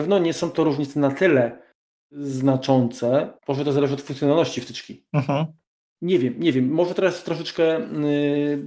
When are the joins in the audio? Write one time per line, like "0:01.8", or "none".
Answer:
0:03.4